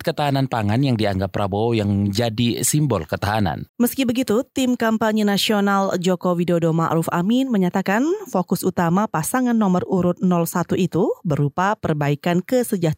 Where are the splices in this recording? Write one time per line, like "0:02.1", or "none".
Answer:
0:03.7